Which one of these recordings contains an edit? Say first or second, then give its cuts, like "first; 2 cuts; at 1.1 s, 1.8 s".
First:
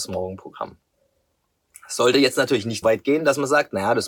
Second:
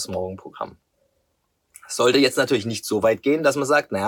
first; 1 cut; at 2.8 s